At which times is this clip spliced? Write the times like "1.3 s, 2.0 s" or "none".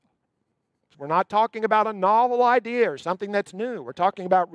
0.9 s